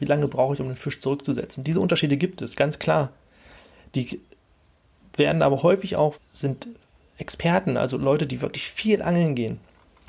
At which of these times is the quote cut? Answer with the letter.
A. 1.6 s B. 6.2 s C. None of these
B